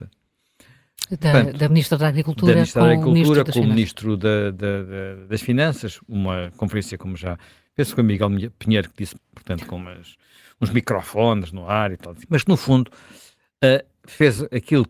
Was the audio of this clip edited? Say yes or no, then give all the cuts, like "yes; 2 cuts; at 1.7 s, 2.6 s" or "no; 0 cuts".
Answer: yes; 2 cuts; at 9.2 s, 12.2 s